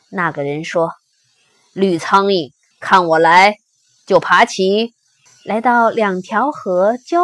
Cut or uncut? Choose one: cut